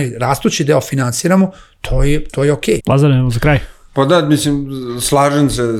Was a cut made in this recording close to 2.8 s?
yes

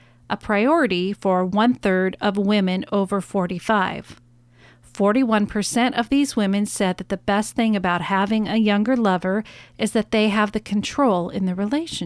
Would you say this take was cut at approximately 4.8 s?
no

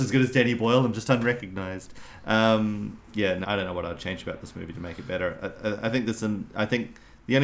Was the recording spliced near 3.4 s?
yes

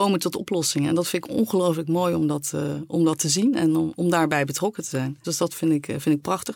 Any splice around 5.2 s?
yes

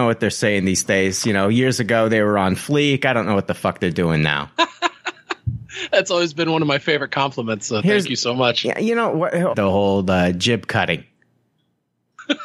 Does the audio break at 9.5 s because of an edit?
yes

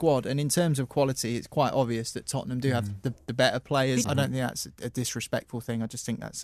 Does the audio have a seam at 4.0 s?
yes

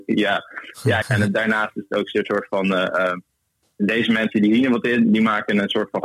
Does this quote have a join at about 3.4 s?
no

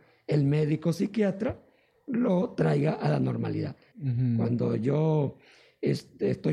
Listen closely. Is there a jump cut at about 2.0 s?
no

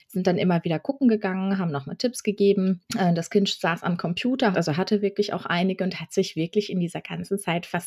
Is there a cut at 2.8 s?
yes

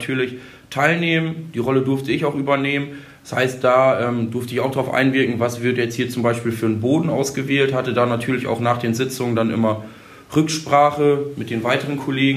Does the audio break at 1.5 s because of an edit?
no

